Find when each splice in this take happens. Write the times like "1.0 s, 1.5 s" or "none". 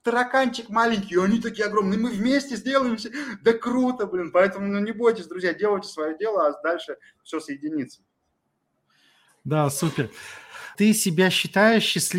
10.8 s